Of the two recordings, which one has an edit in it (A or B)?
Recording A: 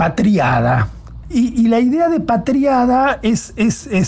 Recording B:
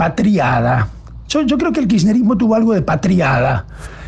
A